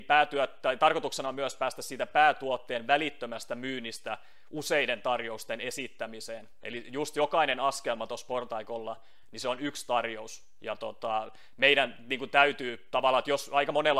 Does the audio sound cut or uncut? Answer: uncut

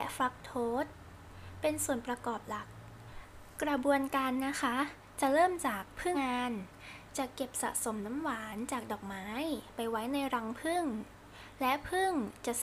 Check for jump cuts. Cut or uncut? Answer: cut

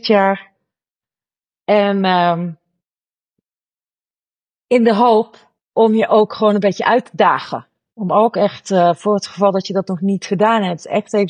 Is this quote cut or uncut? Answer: uncut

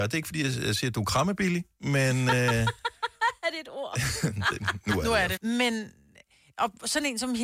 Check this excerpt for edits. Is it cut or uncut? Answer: cut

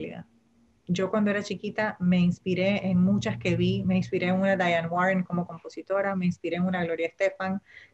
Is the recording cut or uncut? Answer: uncut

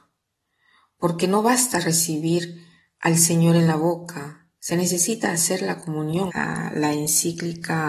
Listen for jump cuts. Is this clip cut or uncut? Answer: cut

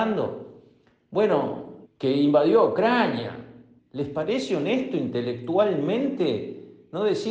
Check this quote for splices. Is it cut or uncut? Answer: cut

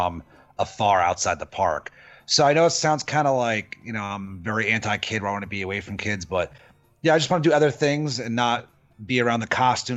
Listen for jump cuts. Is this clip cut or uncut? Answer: uncut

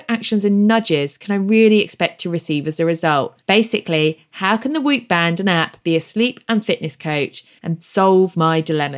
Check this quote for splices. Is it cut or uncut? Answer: cut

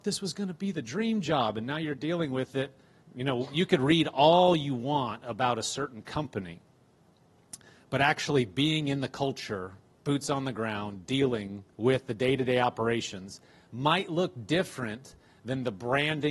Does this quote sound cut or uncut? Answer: cut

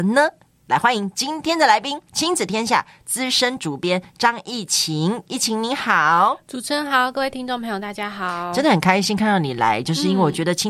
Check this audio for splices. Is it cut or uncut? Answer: cut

